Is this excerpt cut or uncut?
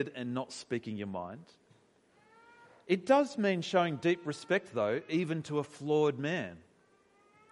uncut